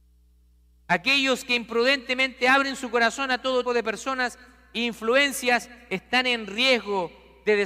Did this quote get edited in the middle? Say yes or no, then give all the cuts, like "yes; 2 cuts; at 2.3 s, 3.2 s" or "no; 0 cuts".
yes; 1 cut; at 3.7 s